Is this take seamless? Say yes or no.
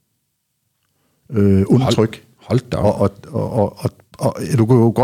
yes